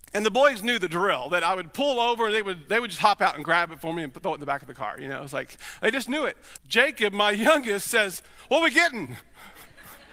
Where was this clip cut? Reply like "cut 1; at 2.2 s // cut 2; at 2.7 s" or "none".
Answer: cut 1; at 6.6 s